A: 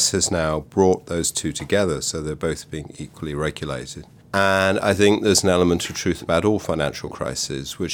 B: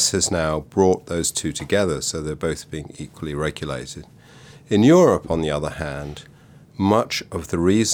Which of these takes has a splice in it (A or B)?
A